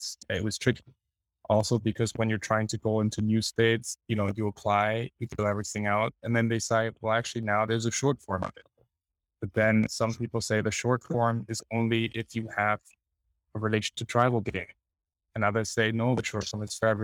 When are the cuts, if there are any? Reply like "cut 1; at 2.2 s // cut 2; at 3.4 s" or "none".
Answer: none

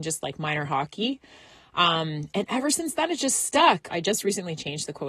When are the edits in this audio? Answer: cut 1; at 3.9 s

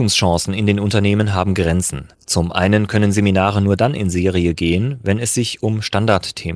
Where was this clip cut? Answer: cut 1; at 2.1 s

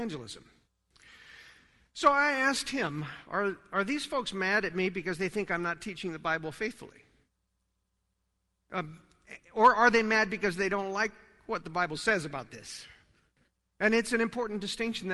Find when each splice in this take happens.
none

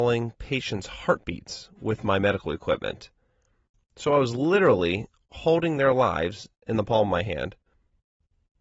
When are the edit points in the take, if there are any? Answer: none

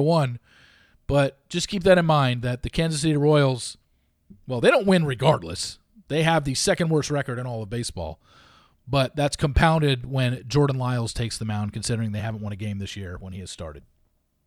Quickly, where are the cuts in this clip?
none

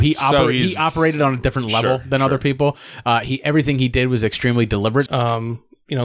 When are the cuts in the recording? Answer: cut 1; at 5.1 s

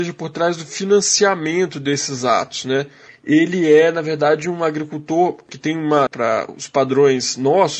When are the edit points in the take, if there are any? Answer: cut 1; at 3.1 s // cut 2; at 6.1 s

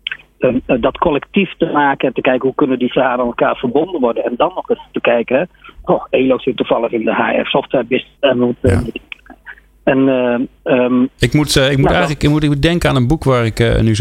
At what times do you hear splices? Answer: cut 1; at 8.2 s

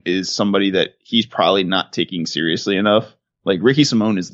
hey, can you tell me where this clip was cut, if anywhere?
none

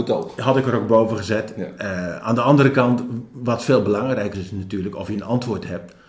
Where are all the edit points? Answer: cut 1; at 4.3 s

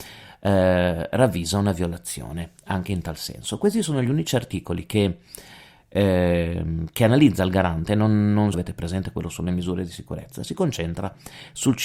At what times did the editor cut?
cut 1; at 8.5 s

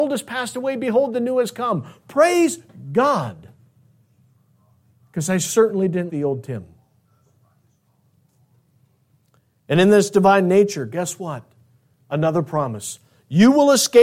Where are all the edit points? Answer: cut 1; at 6.1 s

